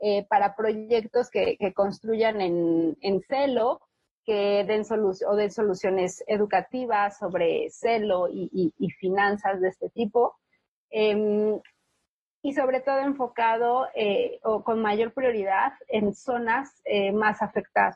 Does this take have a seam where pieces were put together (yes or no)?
no